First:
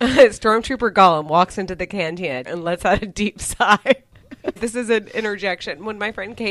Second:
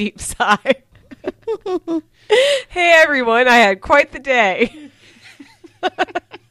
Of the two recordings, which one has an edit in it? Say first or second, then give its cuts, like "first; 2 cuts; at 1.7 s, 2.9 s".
first; 2 cuts; at 2.5 s, 4.6 s